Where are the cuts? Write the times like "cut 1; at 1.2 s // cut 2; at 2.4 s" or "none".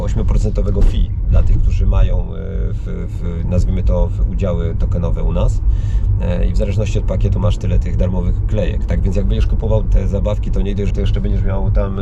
cut 1; at 9.8 s // cut 2; at 10.9 s